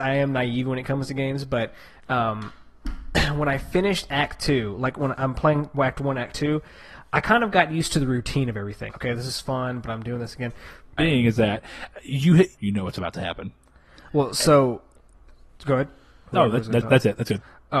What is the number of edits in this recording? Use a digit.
3